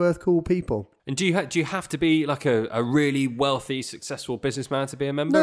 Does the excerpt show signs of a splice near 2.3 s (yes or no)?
no